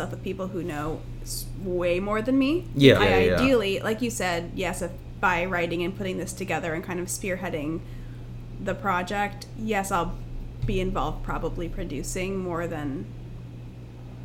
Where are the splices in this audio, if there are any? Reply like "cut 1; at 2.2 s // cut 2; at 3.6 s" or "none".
cut 1; at 3.0 s